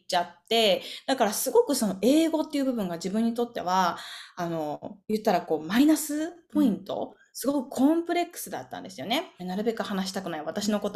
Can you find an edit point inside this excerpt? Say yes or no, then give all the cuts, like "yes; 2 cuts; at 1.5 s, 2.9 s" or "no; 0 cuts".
yes; 1 cut; at 9.4 s